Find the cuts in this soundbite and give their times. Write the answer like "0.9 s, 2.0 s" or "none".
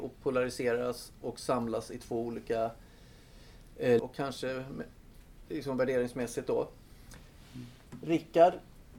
4.0 s